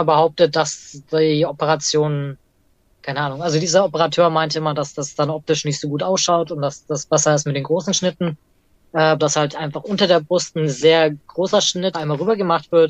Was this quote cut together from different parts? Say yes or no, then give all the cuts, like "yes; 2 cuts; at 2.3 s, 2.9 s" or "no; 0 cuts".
yes; 2 cuts; at 9.2 s, 11.9 s